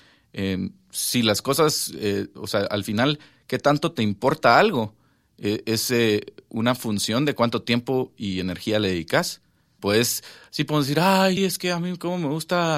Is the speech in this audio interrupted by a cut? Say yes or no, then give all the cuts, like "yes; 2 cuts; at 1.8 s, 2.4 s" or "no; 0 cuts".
yes; 2 cuts; at 9.8 s, 11.4 s